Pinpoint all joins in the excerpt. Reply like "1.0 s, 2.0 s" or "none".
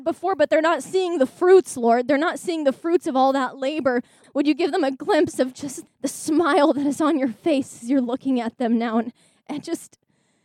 4.2 s, 5.9 s